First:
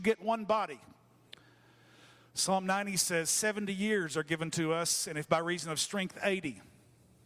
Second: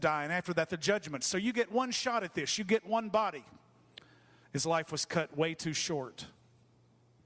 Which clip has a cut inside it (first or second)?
second